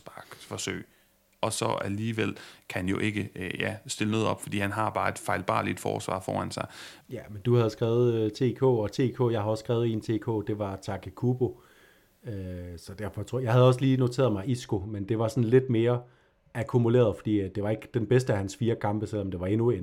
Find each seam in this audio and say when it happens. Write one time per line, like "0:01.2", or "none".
0:07.0